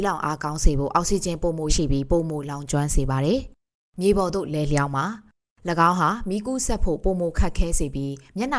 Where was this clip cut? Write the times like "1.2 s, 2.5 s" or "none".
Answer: 1.7 s